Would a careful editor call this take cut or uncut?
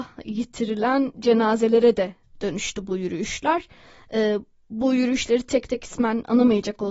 uncut